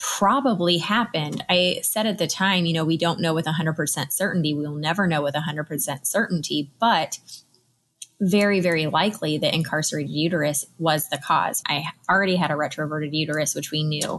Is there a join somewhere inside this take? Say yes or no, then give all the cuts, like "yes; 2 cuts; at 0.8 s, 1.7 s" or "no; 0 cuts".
yes; 1 cut; at 11.6 s